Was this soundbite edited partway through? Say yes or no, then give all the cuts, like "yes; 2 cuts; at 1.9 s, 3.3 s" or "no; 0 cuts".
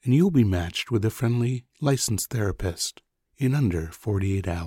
no; 0 cuts